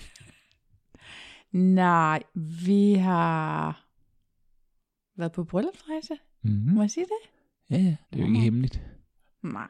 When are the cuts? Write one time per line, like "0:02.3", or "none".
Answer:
0:08.0

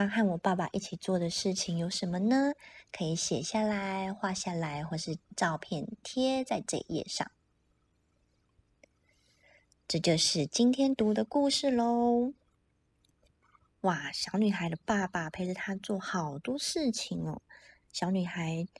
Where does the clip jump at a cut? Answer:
none

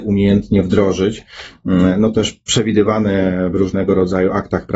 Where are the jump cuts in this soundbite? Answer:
none

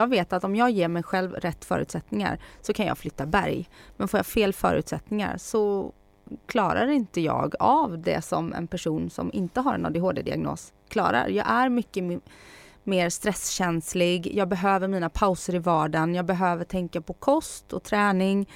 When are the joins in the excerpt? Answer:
none

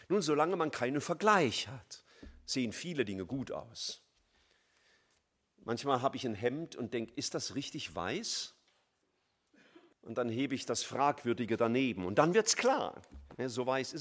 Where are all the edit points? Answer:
0:09.9

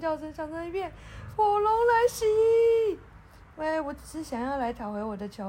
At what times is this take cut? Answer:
0:01.3

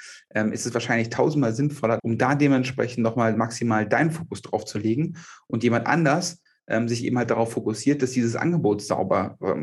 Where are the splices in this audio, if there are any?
0:02.0

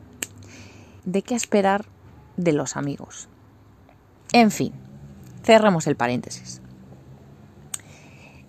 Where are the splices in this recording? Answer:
0:01.0
0:04.3

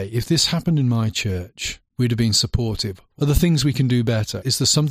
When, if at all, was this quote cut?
0:01.9

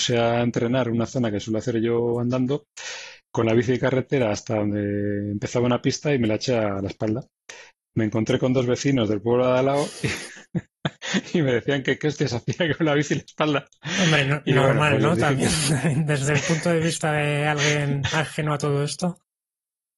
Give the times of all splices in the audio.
none

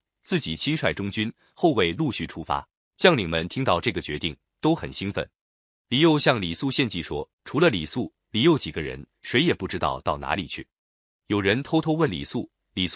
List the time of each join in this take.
0:02.8
0:07.3

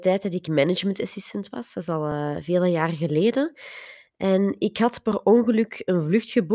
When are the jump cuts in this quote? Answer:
none

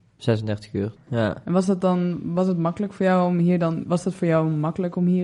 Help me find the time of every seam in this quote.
0:01.0
0:03.8

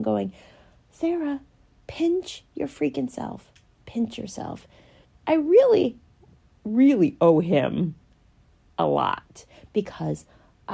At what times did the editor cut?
0:05.1

